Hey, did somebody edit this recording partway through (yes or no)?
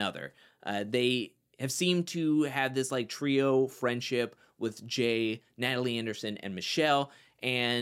no